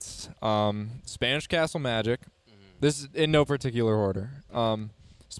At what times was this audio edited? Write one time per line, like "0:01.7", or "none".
none